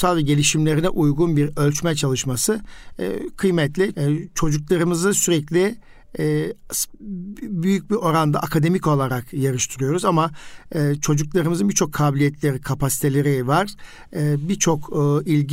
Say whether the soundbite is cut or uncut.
cut